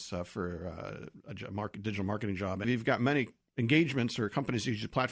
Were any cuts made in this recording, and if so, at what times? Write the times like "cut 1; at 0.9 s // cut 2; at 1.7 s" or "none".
cut 1; at 2.6 s